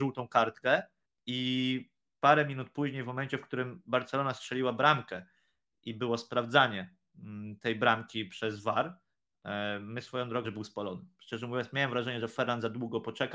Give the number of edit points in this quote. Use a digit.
1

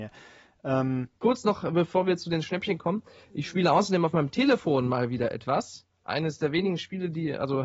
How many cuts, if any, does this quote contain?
1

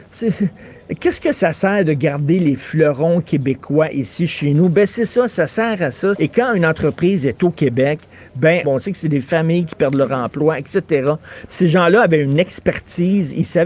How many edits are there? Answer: 3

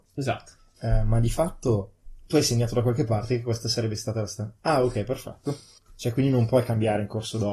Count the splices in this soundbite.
0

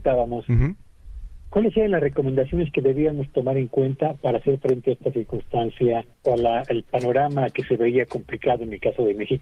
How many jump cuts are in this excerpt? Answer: 1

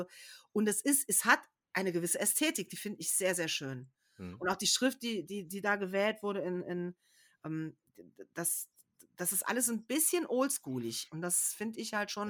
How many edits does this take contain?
0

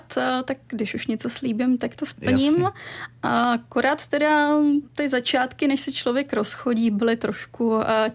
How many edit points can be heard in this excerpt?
0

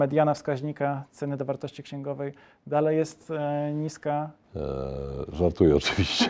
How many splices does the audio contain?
1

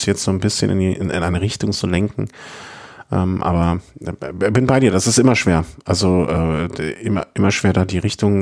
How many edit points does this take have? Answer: 0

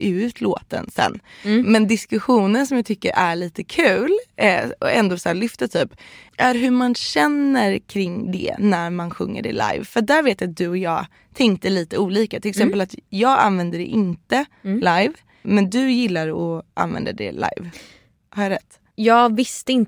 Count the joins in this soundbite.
0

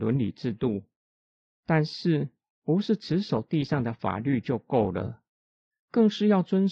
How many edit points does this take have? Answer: 0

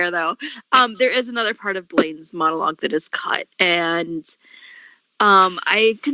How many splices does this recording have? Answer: 0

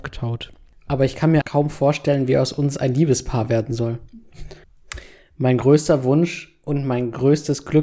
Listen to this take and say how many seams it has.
2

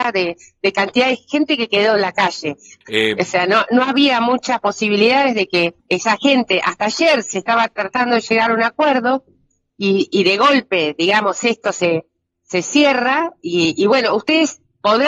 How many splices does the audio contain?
2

